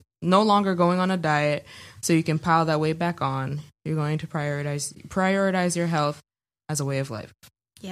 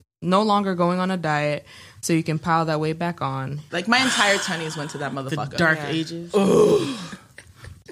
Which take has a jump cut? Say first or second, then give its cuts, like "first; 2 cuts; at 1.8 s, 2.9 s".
second; 1 cut; at 3.7 s